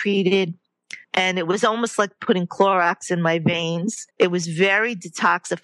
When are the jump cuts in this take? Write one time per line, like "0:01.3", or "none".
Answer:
0:01.0
0:04.1